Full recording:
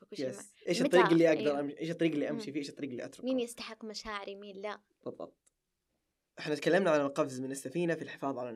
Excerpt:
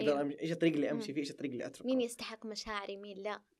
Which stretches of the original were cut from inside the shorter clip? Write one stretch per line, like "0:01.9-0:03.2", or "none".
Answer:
none

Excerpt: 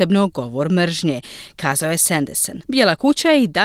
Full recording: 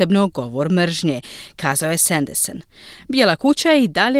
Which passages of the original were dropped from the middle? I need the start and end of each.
0:02.6-0:03.1

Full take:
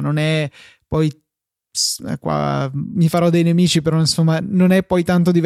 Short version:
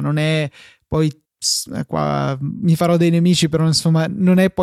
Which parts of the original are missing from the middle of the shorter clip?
0:01.2-0:01.6

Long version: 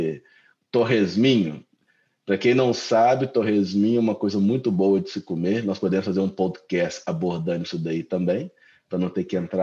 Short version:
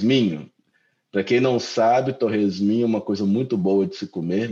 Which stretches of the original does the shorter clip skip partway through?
none

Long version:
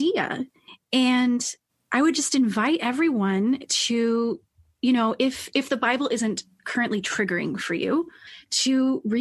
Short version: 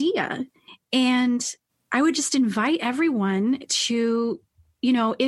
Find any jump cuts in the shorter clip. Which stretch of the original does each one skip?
none

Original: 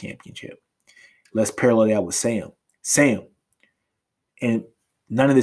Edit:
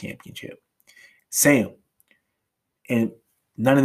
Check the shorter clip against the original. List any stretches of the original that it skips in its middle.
0:01.2-0:02.7

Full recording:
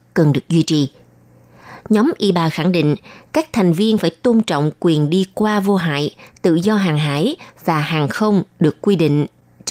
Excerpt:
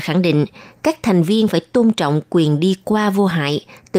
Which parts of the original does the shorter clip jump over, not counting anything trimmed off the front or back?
none

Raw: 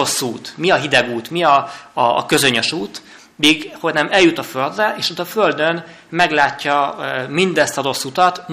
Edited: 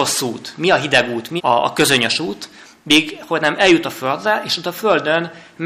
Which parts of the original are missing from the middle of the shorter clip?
0:01.4-0:01.9

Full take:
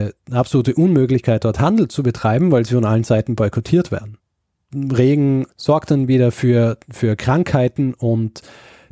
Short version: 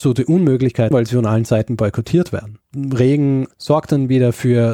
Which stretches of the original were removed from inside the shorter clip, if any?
0:01.4-0:02.5
0:04.2-0:04.6

